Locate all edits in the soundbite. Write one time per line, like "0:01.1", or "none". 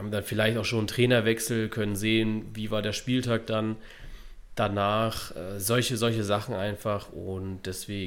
none